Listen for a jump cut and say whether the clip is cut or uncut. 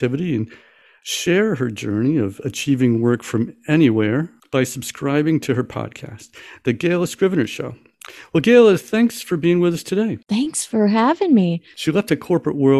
cut